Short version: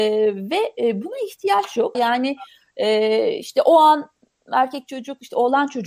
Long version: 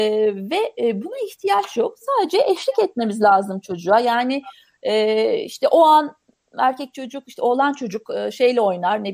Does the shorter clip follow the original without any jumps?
no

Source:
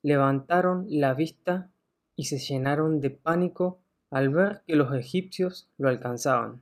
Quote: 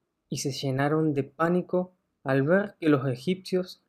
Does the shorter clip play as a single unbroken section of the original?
yes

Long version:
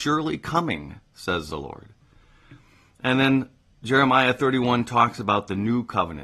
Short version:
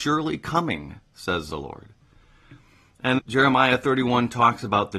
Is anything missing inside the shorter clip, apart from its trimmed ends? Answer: yes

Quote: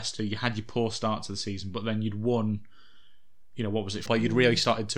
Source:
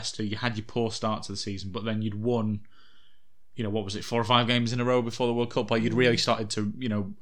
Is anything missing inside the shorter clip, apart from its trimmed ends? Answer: yes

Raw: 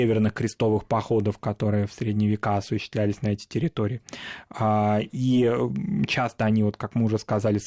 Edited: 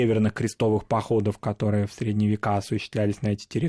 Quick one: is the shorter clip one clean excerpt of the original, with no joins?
yes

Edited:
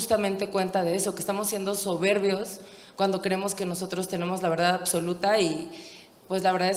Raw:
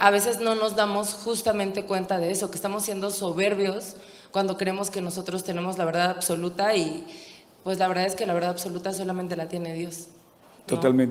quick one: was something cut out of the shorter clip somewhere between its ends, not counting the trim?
no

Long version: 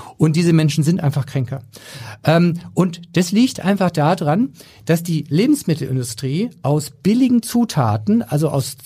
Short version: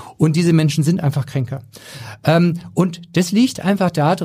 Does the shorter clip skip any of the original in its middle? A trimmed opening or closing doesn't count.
no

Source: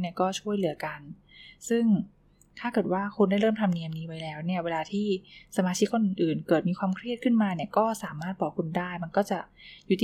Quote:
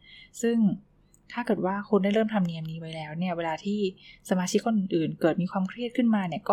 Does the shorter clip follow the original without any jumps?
yes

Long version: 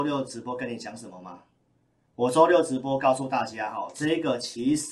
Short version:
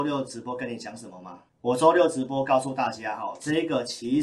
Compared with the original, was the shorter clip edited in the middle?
yes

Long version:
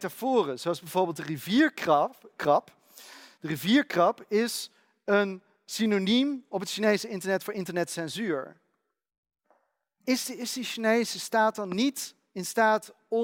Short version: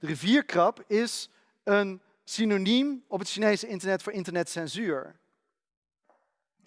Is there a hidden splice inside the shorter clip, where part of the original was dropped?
no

